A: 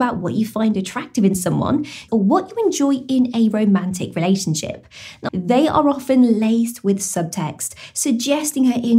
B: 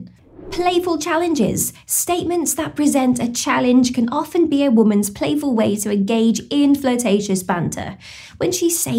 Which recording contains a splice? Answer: A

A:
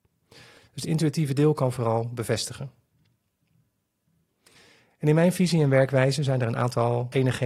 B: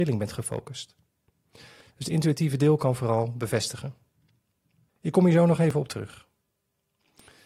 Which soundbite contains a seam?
B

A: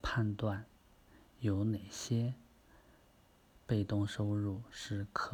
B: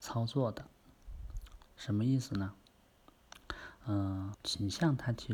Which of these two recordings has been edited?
B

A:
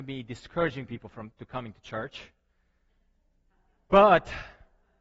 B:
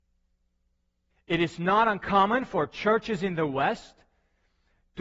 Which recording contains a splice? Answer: B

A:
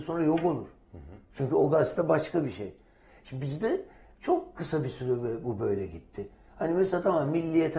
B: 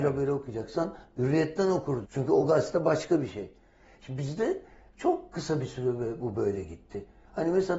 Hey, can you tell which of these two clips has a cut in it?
B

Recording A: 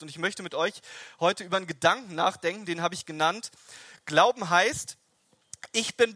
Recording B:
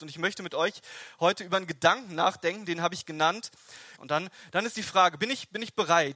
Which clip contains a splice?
B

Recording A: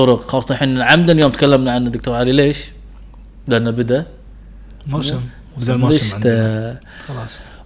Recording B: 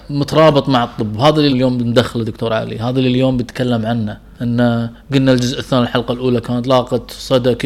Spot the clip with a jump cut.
B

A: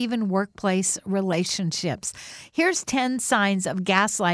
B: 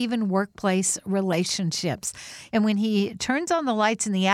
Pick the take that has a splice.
B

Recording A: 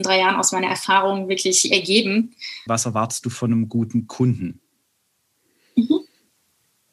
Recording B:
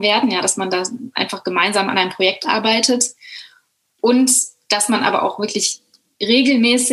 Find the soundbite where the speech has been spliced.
A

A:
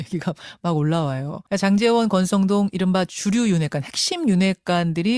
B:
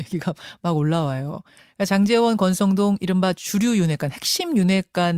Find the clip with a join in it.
A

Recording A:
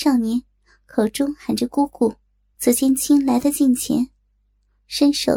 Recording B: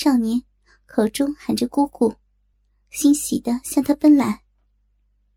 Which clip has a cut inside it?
A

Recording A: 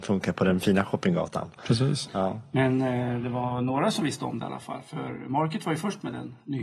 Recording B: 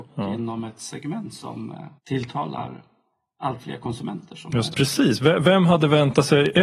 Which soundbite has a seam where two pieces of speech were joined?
B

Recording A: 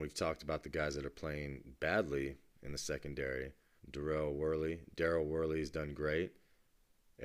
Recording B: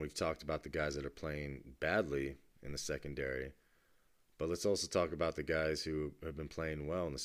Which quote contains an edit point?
A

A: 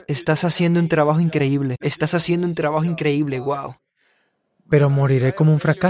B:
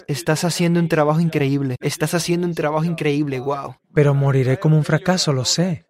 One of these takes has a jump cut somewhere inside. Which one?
B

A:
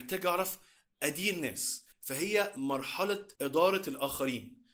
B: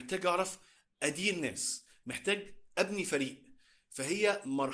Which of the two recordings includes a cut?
A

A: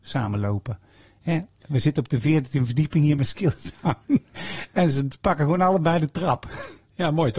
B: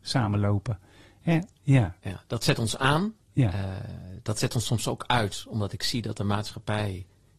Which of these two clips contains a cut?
B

